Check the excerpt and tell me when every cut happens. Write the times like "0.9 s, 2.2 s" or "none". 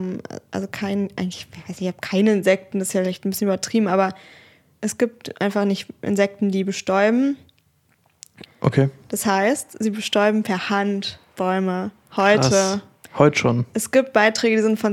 8.5 s